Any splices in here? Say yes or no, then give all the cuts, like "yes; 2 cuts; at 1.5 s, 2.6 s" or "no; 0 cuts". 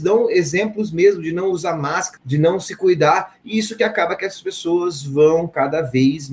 yes; 1 cut; at 2.2 s